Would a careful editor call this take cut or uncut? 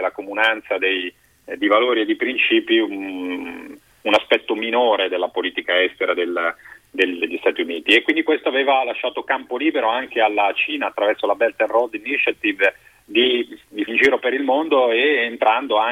cut